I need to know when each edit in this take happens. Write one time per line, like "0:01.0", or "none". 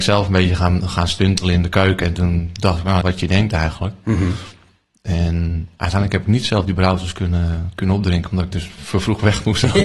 0:03.0